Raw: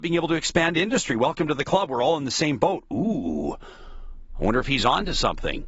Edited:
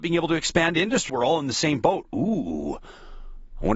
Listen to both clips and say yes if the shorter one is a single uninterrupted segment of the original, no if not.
no